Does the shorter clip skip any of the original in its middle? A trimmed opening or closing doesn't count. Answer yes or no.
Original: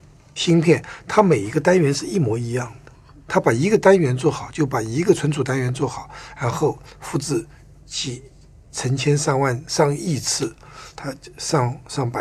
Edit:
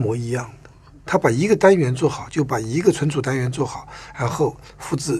no